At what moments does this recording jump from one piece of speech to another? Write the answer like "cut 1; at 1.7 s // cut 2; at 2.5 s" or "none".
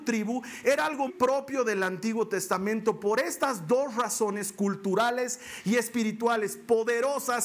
cut 1; at 1.1 s